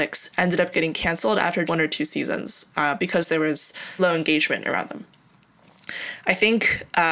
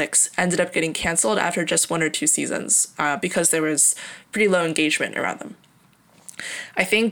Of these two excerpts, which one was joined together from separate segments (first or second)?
first